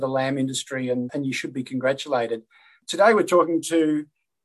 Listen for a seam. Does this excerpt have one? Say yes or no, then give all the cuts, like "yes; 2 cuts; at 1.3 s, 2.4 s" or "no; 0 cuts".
yes; 1 cut; at 1.1 s